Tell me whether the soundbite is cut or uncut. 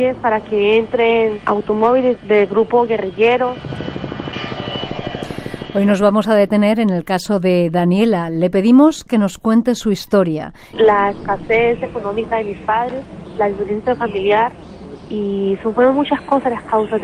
cut